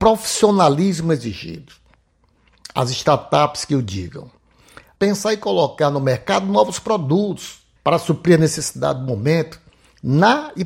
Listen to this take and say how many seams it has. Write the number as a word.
two